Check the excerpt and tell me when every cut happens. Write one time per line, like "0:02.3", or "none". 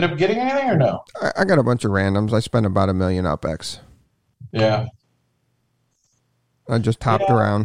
none